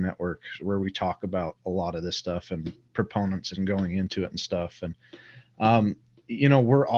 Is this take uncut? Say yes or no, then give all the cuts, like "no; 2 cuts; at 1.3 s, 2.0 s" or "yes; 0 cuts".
yes; 0 cuts